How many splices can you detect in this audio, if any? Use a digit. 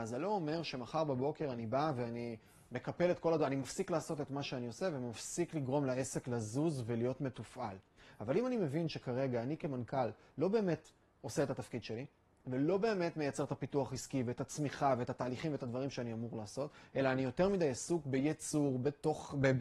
0